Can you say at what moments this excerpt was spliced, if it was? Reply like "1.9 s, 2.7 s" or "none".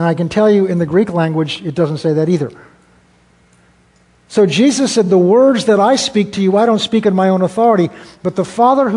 none

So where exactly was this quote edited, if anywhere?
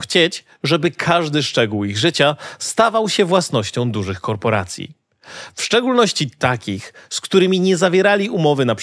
none

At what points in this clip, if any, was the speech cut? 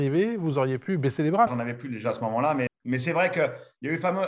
1.5 s, 2.7 s

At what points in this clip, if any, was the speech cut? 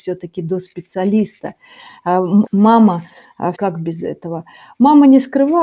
2.5 s, 3.5 s

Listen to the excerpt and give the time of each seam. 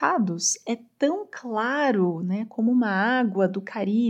none

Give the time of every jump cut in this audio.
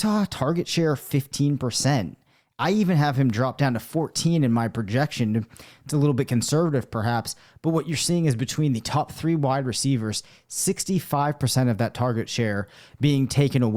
none

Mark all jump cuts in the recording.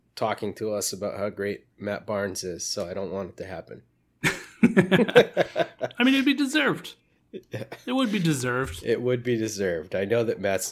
none

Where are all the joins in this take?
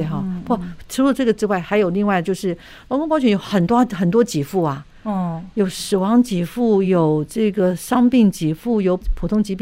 none

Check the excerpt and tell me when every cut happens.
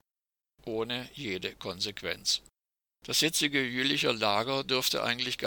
3.0 s

